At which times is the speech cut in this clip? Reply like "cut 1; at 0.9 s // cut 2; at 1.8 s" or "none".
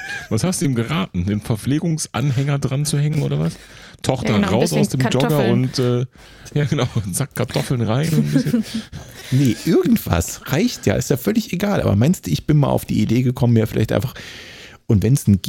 none